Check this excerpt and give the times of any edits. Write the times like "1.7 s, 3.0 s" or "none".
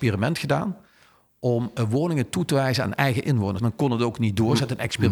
3.6 s